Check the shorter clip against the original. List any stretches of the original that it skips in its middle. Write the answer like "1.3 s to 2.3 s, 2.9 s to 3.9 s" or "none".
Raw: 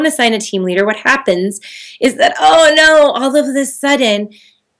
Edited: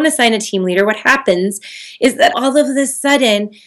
2.3 s to 3.1 s